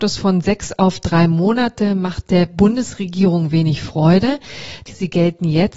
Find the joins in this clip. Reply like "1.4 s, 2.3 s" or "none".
4.9 s